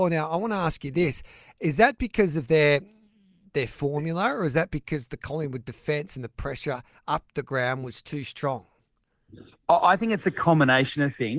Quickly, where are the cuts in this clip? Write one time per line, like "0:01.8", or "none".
none